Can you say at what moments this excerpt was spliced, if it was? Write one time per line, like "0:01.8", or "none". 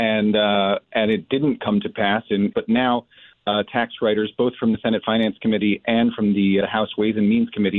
0:02.5
0:06.6